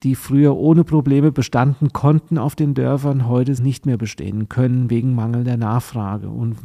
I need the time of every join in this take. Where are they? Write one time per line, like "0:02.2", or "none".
0:03.6